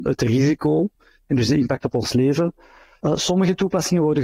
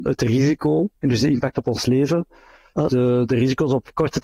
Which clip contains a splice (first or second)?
second